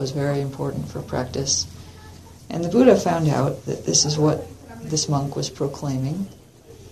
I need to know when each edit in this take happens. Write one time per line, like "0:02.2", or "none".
none